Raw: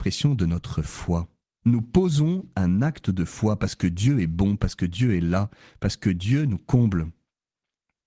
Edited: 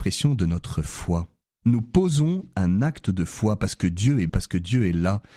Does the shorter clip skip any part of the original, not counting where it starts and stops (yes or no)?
yes